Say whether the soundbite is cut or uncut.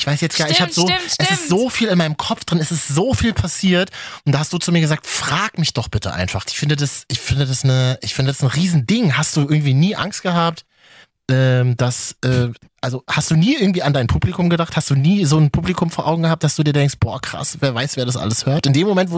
cut